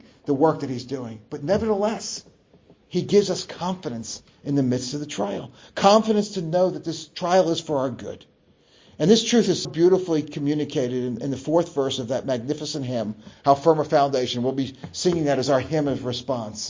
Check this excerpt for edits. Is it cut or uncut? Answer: cut